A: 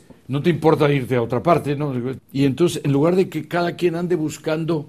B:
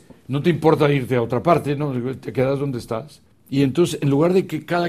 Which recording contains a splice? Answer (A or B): A